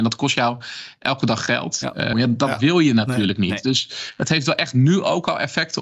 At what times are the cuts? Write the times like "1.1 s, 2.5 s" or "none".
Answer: 2.1 s